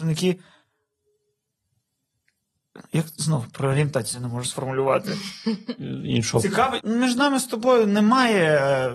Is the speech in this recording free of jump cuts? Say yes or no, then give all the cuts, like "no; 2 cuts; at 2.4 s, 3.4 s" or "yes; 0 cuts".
no; 1 cut; at 6.8 s